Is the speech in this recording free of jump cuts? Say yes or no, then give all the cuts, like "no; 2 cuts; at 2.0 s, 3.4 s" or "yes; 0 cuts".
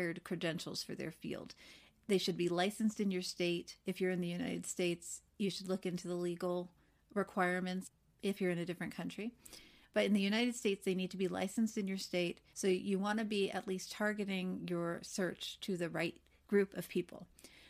no; 1 cut; at 12.5 s